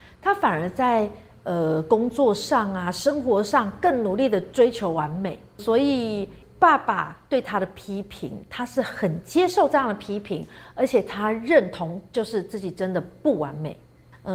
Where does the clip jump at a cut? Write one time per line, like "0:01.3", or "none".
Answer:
none